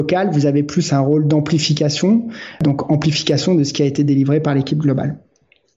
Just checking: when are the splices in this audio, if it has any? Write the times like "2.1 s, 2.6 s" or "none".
none